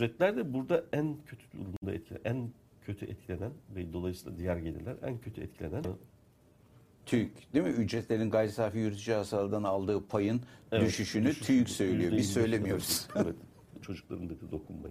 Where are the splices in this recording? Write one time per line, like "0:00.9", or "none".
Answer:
0:05.8
0:13.8